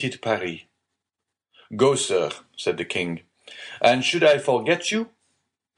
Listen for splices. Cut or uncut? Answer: uncut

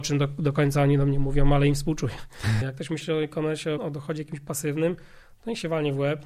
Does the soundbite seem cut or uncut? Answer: cut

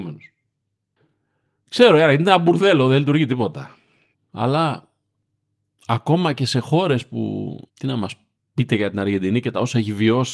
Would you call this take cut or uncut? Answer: cut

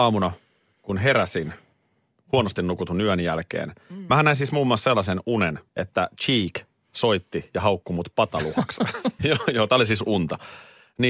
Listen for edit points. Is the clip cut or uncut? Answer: cut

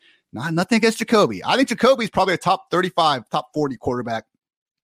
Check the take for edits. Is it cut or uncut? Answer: uncut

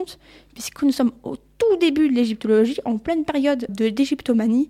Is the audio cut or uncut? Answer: cut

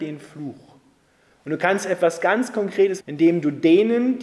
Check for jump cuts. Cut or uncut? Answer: cut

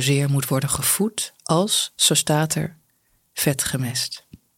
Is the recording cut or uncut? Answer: uncut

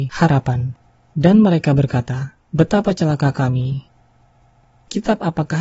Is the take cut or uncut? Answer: cut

